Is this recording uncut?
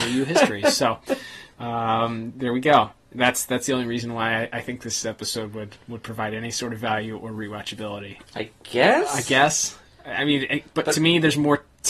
no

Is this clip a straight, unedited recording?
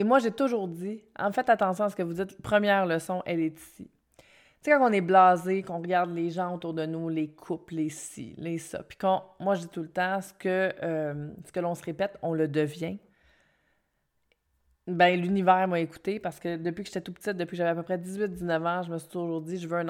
yes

